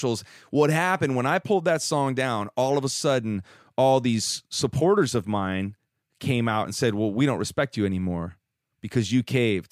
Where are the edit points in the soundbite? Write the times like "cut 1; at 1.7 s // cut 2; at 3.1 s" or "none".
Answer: none